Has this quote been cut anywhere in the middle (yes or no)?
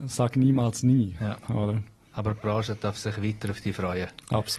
no